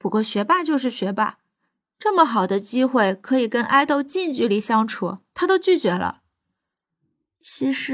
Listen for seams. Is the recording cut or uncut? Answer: uncut